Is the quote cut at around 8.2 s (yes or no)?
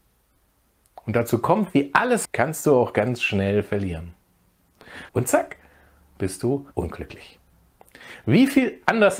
no